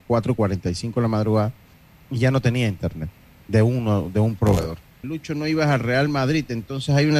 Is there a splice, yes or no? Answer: yes